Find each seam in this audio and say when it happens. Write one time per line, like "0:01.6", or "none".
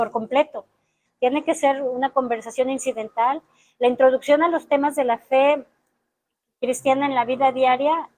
0:01.1